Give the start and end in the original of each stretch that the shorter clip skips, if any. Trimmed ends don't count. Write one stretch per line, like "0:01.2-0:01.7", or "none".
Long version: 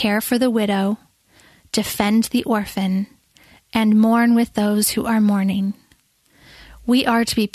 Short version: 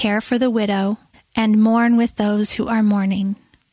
0:01.1-0:03.5